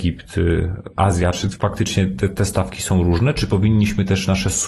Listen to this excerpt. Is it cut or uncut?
uncut